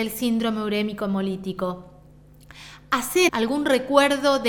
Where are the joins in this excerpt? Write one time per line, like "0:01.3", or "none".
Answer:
0:03.3